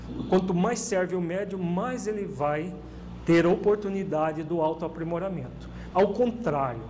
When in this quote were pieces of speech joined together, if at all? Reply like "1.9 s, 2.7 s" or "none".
5.9 s